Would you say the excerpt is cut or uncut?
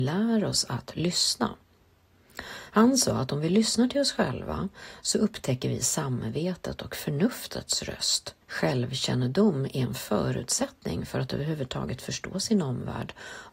cut